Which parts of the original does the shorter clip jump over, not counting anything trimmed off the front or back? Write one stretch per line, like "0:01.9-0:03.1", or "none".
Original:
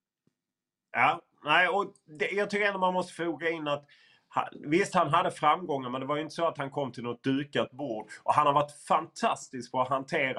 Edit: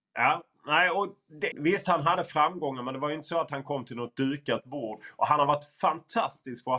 0:02.3-0:04.6